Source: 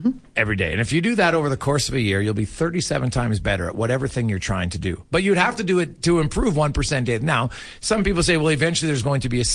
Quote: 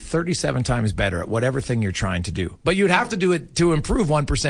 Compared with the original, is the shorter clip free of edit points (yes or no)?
yes